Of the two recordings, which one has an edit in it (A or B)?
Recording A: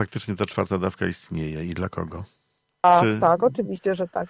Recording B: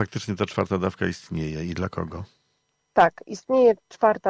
A